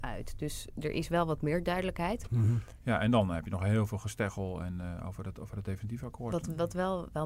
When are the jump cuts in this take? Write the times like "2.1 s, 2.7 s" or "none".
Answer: 2.3 s